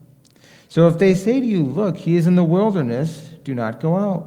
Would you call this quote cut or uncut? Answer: uncut